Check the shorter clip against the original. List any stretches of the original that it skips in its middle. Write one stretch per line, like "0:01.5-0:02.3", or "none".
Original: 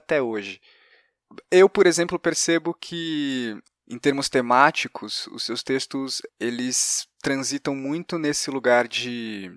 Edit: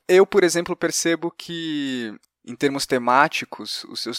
none